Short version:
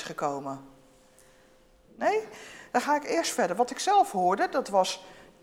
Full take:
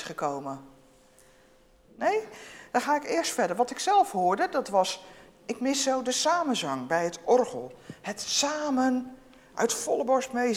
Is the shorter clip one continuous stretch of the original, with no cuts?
yes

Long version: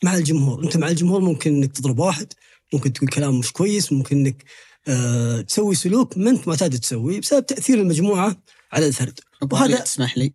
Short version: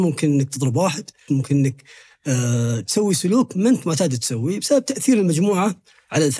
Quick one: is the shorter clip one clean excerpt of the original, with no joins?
no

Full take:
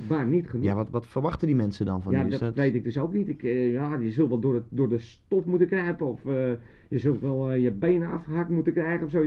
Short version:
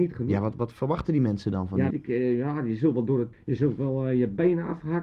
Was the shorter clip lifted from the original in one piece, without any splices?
no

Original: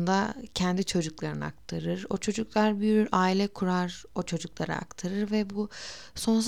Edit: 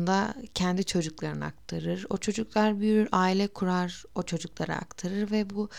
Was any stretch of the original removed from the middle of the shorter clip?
no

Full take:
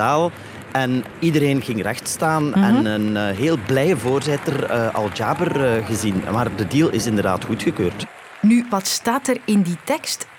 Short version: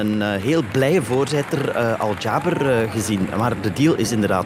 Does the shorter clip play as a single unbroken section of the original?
yes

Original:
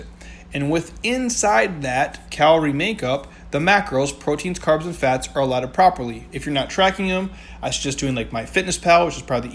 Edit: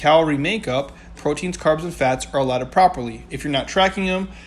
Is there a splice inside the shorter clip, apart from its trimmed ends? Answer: yes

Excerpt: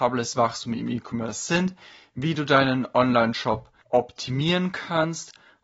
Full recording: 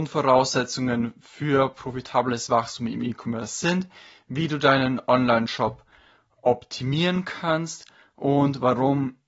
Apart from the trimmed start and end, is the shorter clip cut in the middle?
yes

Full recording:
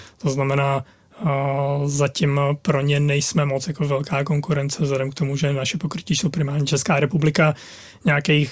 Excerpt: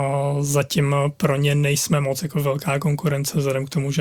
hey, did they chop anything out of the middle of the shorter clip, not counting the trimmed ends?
no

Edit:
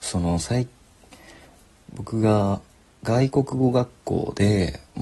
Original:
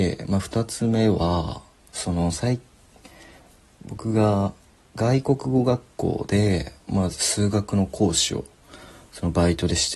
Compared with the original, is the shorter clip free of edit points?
yes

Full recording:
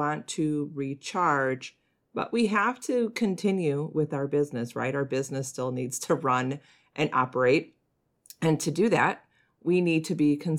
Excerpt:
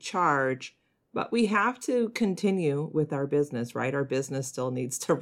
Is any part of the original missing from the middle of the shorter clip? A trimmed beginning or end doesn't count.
no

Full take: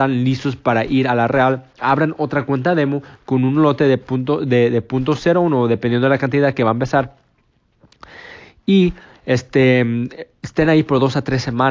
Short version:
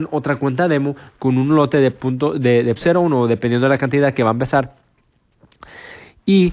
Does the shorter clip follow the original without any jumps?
no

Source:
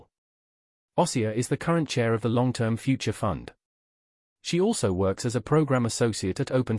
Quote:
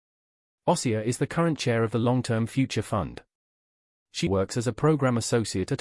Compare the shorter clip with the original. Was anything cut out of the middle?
yes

